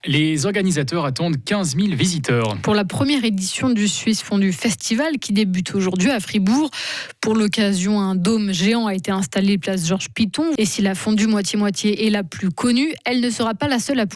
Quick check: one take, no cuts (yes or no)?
no